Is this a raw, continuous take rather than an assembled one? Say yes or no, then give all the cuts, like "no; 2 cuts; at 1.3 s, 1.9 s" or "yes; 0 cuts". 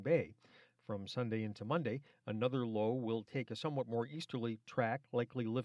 yes; 0 cuts